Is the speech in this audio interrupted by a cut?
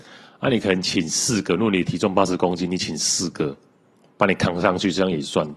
no; 0 cuts

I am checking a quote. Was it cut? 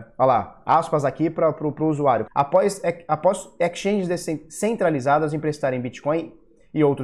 yes; 1 cut; at 2.3 s

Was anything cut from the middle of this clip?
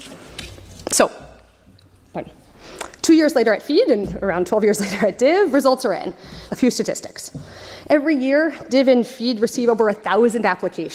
yes; 1 cut; at 6.5 s

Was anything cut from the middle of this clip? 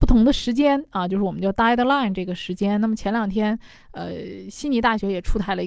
no; 0 cuts

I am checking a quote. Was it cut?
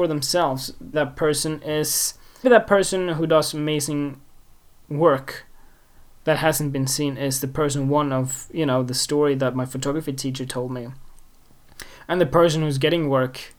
yes; 2 cuts; at 0.9 s, 2.4 s

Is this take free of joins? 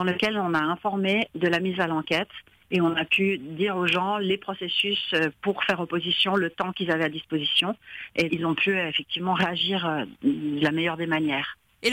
no; 1 cut; at 8.3 s

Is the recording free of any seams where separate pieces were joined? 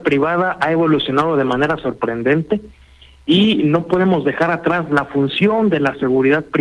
yes; 0 cuts

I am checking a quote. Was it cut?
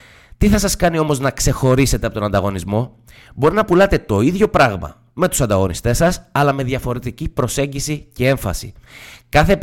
no; 0 cuts

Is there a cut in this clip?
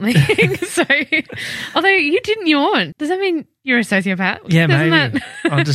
yes; 1 cut; at 2.9 s

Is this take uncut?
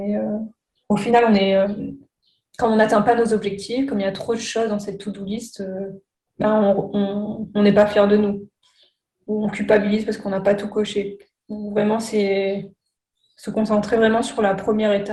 yes; 0 cuts

